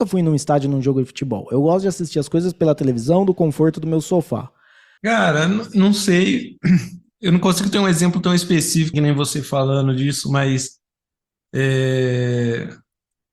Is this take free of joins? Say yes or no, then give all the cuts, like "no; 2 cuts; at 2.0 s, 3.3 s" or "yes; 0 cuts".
no; 2 cuts; at 5.0 s, 8.9 s